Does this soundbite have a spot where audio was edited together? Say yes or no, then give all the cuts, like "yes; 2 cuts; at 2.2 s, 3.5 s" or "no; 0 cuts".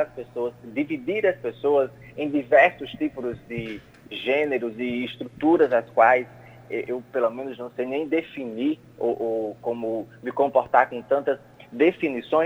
no; 0 cuts